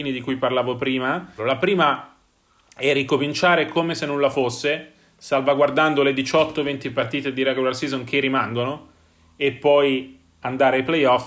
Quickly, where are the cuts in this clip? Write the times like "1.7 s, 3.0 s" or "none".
1.4 s